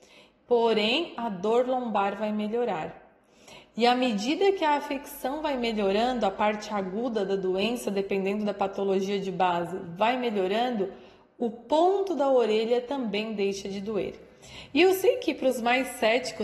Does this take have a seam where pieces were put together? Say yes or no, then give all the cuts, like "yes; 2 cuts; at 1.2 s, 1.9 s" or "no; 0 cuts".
no; 0 cuts